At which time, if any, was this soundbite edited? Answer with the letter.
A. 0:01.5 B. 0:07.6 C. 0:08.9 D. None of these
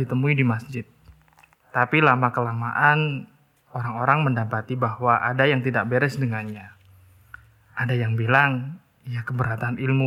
A